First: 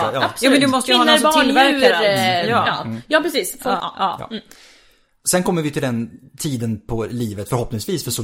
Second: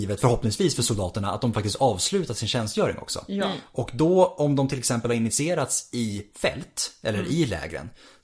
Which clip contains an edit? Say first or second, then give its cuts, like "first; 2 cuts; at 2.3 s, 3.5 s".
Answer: first; 1 cut; at 3.8 s